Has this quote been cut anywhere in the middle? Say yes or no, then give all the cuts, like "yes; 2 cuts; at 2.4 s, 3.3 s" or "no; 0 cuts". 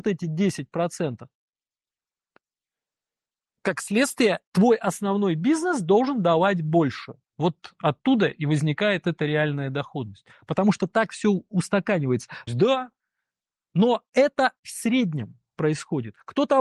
yes; 2 cuts; at 7.2 s, 12.5 s